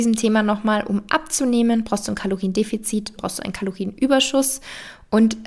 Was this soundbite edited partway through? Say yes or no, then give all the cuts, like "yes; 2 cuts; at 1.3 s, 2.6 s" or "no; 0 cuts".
yes; 1 cut; at 3.2 s